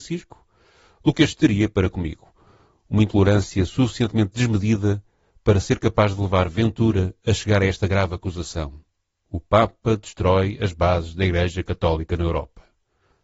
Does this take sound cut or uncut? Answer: uncut